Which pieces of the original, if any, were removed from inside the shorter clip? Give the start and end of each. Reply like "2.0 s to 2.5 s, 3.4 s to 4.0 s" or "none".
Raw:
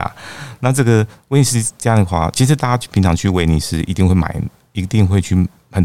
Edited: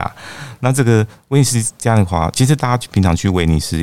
none